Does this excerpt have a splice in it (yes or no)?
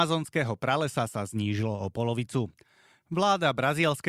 no